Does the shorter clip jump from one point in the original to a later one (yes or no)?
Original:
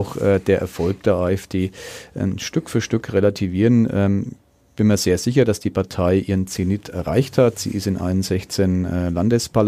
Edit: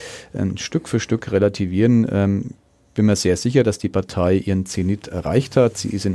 no